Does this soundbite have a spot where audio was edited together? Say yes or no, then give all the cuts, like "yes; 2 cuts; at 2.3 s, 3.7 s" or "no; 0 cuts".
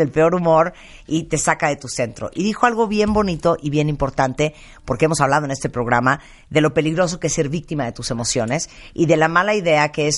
no; 0 cuts